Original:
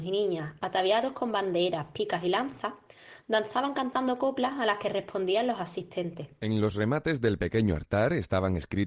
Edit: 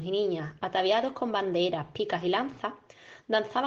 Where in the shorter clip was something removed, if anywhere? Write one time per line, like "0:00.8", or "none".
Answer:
none